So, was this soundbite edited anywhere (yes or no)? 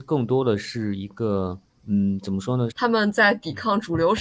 yes